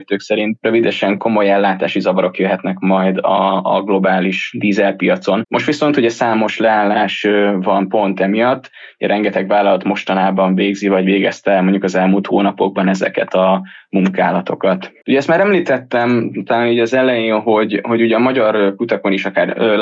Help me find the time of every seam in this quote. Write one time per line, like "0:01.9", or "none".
0:05.4
0:15.0